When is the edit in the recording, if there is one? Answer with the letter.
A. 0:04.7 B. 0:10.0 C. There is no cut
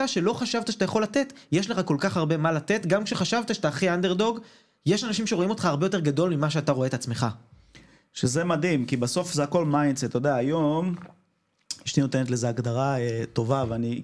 C